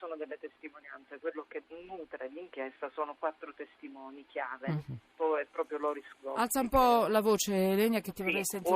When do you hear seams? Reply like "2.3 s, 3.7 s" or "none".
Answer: 5.1 s